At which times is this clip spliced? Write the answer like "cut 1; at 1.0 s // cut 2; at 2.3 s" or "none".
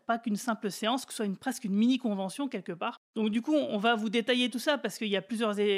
none